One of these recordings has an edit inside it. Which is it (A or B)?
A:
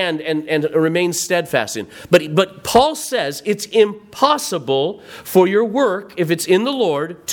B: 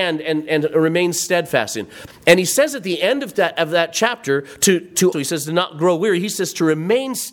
B